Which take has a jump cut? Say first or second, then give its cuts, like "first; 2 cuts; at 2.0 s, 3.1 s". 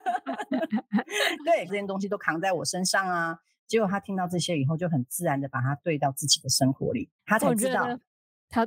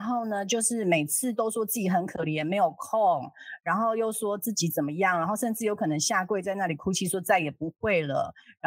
first; 2 cuts; at 1.7 s, 7.2 s